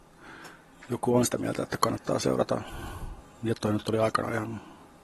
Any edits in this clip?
no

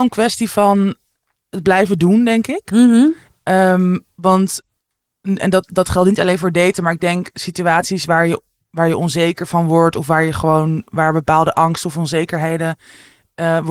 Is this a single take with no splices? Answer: yes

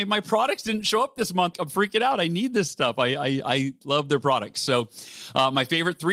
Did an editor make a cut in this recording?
yes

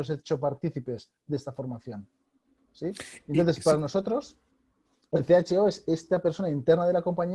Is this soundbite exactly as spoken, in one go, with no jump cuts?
yes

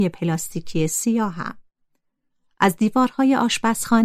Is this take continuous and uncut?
yes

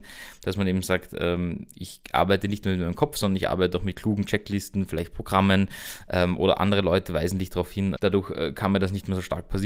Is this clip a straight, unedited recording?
no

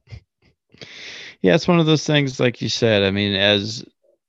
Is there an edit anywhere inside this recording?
no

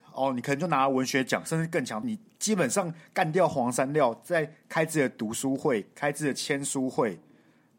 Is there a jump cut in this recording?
yes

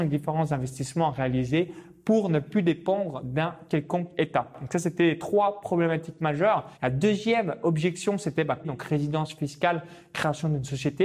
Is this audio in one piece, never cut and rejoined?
no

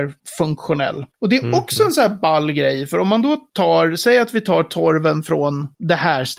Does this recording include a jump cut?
yes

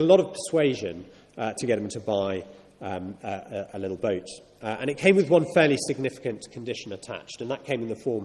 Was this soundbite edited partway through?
no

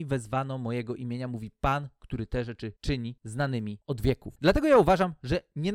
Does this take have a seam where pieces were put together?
yes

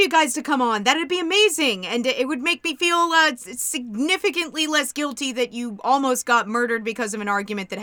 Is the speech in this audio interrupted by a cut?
no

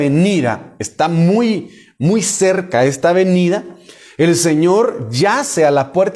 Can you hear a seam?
no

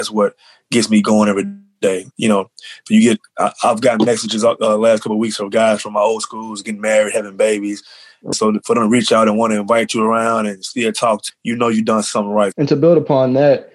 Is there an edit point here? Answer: yes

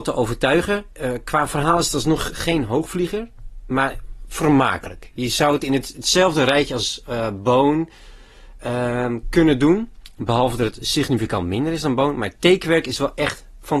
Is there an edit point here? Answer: no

